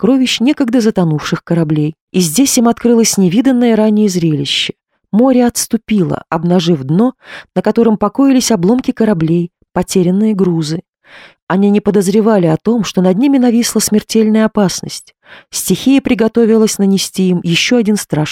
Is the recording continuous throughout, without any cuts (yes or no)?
no